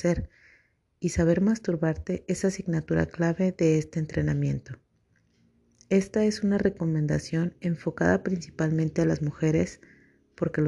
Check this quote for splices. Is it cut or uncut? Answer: uncut